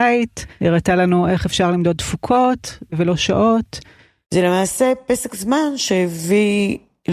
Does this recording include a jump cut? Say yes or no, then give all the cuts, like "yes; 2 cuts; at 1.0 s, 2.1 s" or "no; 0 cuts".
yes; 1 cut; at 4.2 s